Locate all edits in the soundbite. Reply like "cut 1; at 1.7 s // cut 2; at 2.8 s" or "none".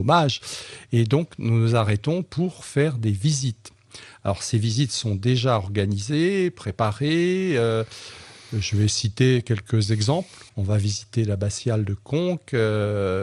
cut 1; at 10.5 s